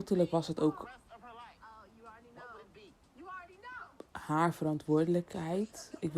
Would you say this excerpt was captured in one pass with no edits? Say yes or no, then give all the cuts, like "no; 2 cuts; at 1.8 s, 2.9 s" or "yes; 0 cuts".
yes; 0 cuts